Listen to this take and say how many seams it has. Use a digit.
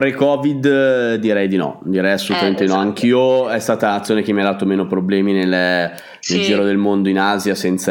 0